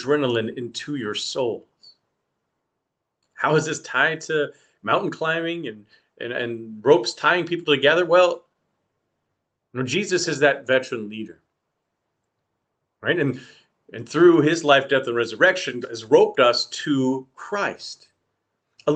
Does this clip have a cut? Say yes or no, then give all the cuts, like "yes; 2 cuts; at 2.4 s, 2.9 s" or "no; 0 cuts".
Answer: yes; 2 cuts; at 3.2 s, 15.8 s